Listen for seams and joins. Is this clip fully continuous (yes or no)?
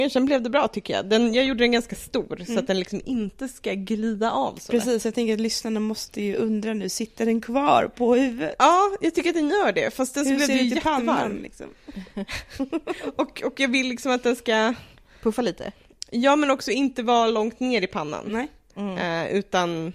yes